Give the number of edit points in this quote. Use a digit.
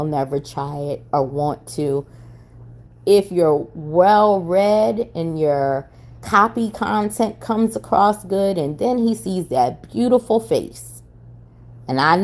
2